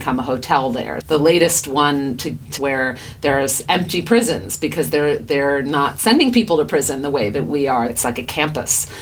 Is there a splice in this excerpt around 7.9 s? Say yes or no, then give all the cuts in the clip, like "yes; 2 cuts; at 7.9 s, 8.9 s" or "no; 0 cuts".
yes; 3 cuts; at 1.0 s, 2.6 s, 7.9 s